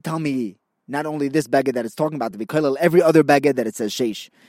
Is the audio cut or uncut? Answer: uncut